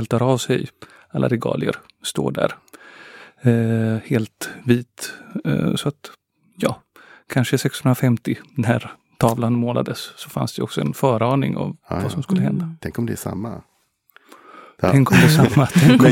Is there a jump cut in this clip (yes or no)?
no